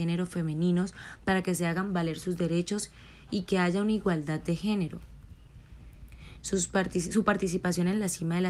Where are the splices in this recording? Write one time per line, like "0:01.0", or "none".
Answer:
0:06.4